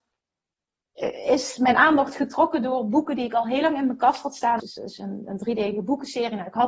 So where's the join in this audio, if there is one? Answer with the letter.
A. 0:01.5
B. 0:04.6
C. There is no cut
B